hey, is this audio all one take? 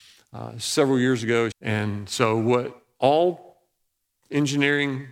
no; 1 cut; at 1.5 s

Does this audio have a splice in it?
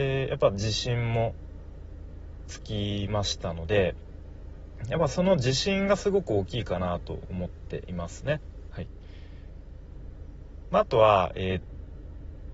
yes; 2 cuts; at 8.7 s, 11.6 s

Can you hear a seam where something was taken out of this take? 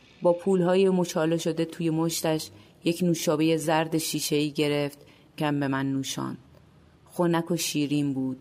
yes; 1 cut; at 5.4 s

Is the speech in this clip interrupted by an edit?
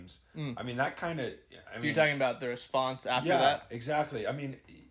no; 0 cuts

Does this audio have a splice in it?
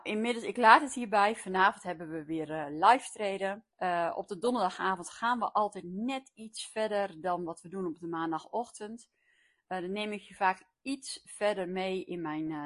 yes; 1 cut; at 3.7 s

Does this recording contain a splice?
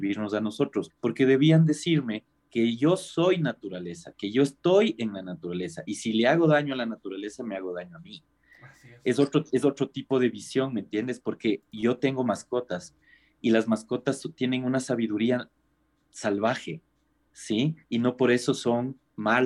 yes; 1 cut; at 0.9 s

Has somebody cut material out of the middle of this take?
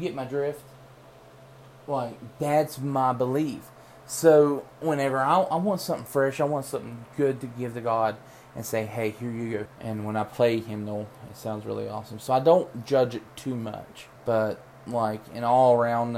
yes; 2 cuts; at 9.7 s, 14.2 s

